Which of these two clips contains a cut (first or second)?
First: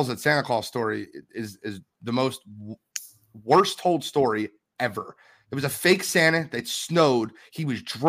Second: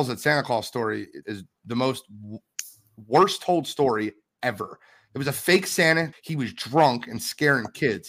second